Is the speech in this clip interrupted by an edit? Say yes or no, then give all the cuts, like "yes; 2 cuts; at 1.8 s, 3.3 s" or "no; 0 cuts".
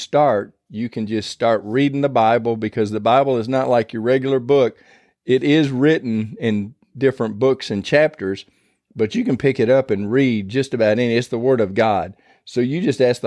no; 0 cuts